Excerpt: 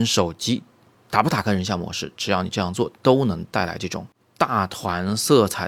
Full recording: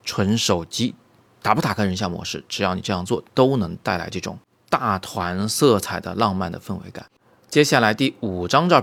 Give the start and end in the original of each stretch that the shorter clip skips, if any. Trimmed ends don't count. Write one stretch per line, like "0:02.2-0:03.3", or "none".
none

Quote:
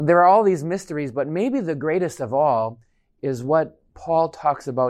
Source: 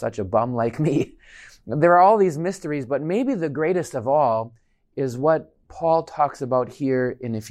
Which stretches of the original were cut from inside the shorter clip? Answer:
none

